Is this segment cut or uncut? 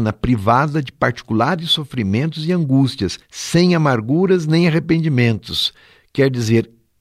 uncut